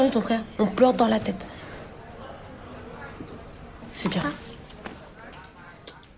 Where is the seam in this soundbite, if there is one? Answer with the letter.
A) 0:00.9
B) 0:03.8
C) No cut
B